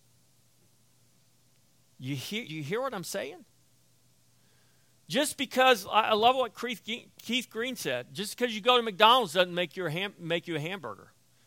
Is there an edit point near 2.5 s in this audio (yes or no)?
yes